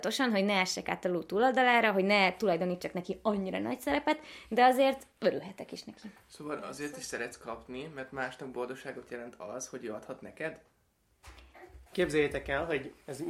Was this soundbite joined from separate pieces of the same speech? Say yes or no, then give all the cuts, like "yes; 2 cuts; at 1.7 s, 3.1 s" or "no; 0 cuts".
yes; 1 cut; at 11.9 s